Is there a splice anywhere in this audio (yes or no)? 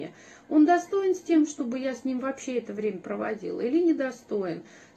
no